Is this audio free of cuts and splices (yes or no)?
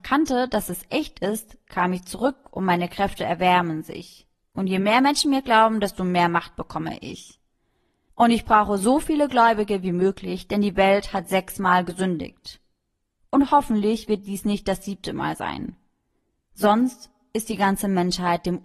yes